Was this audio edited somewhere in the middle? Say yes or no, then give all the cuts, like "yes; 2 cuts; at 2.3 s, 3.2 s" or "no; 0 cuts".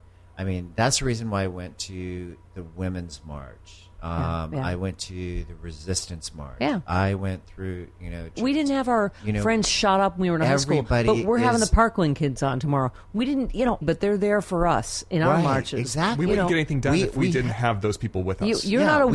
yes; 2 cuts; at 8.3 s, 13.8 s